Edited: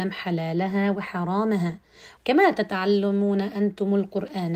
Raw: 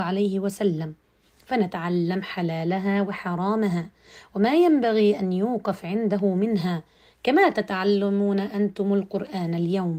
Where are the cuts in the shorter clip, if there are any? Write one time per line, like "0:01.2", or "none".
0:02.2